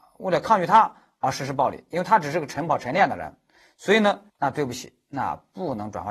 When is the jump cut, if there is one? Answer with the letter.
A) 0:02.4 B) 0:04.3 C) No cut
B